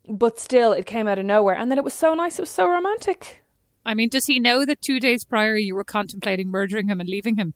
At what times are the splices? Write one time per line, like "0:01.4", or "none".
none